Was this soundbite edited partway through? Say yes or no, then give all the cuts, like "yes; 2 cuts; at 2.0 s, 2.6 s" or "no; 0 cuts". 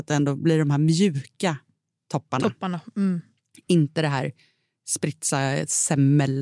no; 0 cuts